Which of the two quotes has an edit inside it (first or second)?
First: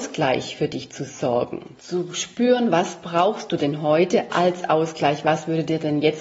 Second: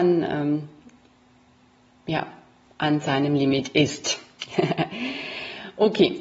first